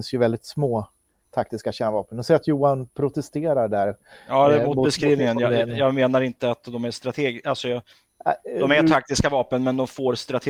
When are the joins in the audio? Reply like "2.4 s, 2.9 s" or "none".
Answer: none

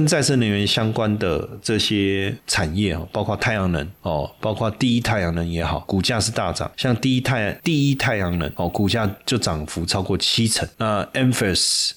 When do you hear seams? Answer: 5.9 s

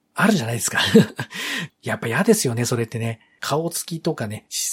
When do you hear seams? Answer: 1.7 s, 3.4 s

